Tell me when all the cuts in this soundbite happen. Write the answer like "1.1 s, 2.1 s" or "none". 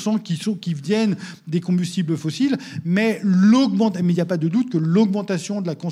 none

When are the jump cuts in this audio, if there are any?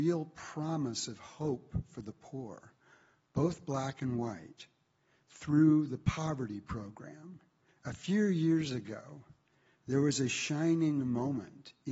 7.7 s

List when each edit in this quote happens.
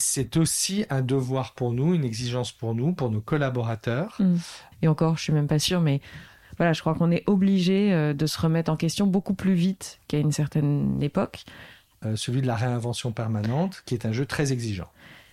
4.7 s, 12.0 s

